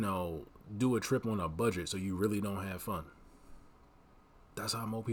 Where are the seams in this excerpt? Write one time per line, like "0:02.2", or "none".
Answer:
none

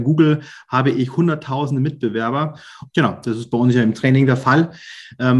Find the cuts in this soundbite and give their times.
0:02.9

